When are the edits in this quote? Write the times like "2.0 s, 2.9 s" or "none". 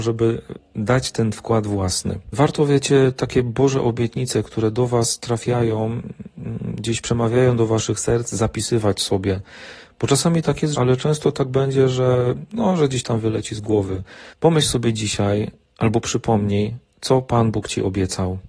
2.3 s, 10.7 s, 14.3 s